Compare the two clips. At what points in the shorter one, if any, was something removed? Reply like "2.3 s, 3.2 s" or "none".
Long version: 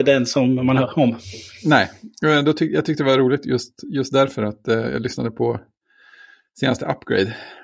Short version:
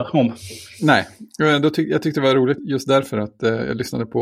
2.6 s